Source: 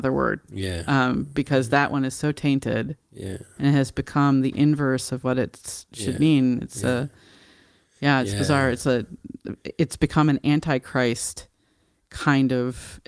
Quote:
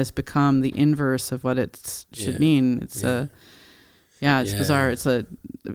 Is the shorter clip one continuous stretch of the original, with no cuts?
yes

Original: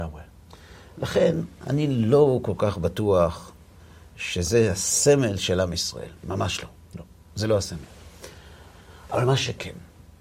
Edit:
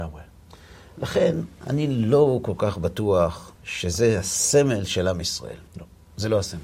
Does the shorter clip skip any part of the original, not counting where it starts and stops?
yes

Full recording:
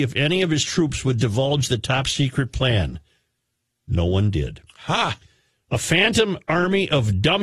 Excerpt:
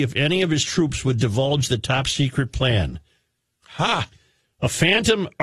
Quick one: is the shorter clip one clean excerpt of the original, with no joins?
no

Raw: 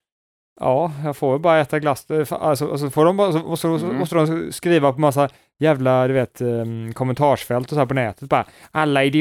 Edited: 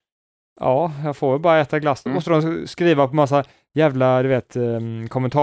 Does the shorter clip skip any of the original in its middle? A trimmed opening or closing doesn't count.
yes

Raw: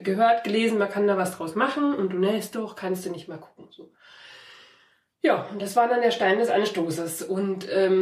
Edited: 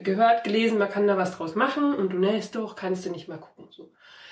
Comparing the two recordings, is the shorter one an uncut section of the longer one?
yes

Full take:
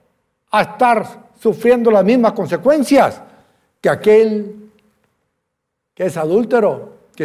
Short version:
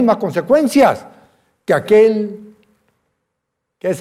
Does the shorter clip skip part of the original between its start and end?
no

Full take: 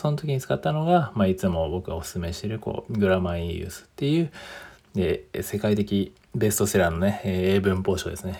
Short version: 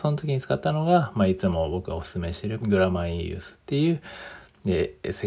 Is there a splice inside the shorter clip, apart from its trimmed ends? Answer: yes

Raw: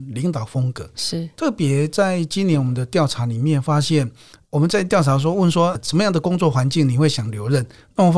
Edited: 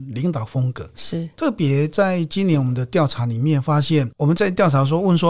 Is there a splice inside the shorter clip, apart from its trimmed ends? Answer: yes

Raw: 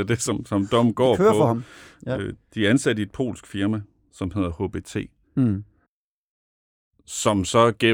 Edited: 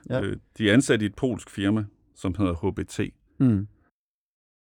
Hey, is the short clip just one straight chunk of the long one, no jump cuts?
yes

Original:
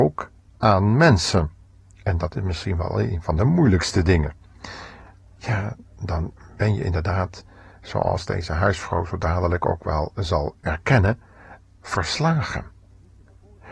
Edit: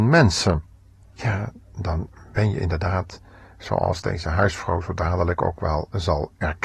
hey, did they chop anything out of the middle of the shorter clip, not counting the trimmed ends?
yes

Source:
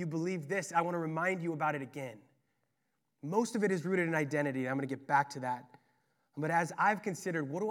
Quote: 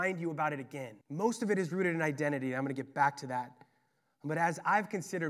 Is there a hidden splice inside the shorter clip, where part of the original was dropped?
yes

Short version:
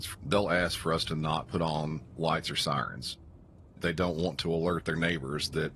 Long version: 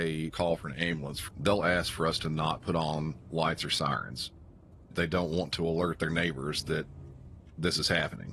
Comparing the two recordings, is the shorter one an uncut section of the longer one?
yes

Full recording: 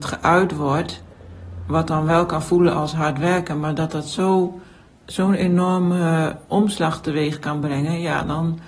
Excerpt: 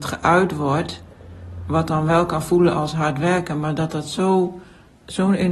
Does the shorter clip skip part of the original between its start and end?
no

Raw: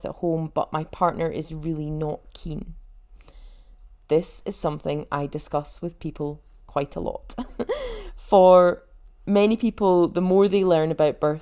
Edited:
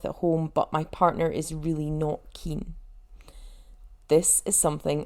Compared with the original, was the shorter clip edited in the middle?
no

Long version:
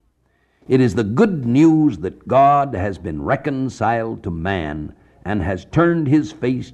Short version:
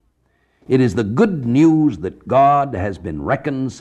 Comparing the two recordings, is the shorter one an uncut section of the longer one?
yes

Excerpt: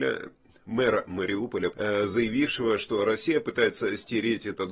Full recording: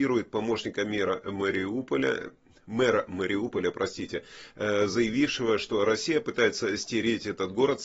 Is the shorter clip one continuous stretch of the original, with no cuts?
no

